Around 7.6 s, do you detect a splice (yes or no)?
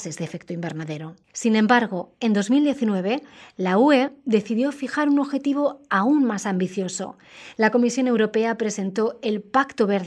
no